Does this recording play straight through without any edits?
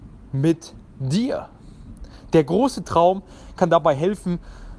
yes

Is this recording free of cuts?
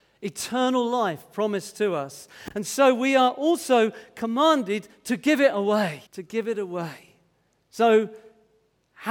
no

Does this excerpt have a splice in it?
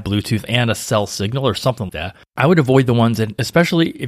yes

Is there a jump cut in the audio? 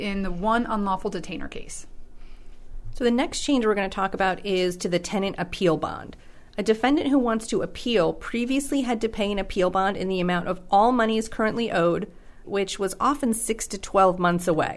yes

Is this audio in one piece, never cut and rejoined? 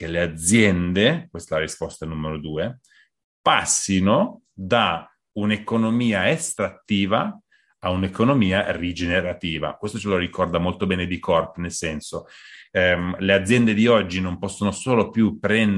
yes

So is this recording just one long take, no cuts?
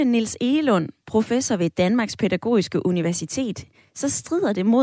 yes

